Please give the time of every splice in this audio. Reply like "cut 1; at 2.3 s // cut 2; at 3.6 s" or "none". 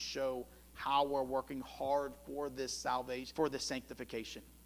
cut 1; at 3.3 s